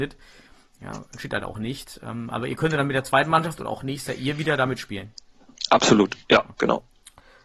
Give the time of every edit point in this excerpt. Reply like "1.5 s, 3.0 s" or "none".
6.5 s